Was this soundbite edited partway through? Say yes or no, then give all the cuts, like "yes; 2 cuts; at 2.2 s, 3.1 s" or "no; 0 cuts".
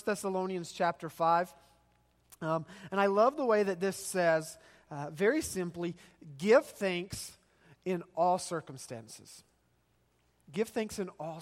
no; 0 cuts